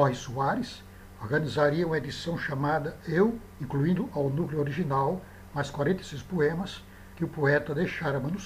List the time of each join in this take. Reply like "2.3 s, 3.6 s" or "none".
3.5 s